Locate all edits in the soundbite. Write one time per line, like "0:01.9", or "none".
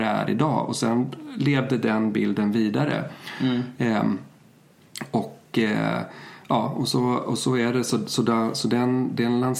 none